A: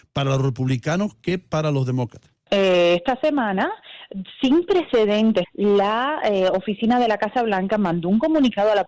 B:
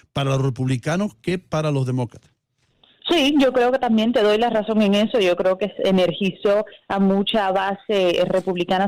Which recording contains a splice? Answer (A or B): A